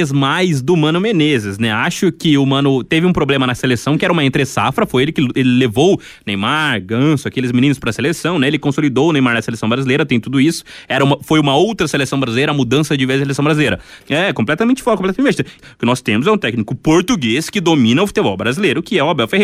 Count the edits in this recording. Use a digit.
2